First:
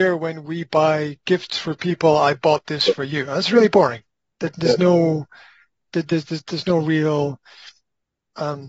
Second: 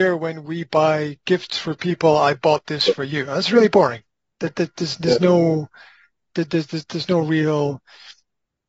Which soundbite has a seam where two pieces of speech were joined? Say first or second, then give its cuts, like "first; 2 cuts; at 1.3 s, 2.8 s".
first; 1 cut; at 4.5 s